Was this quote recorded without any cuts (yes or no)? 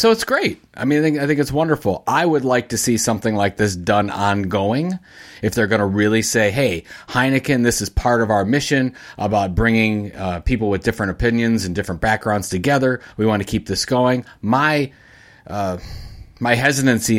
yes